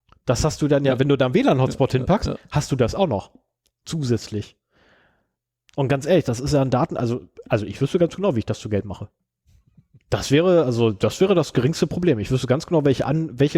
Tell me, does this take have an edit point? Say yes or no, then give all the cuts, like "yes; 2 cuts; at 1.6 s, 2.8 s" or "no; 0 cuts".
no; 0 cuts